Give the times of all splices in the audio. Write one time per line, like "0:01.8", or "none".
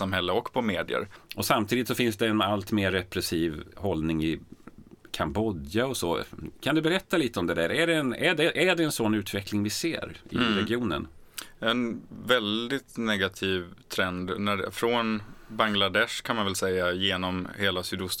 0:01.2